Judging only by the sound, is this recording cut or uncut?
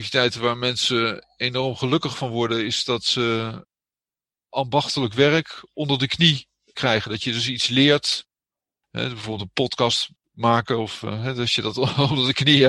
uncut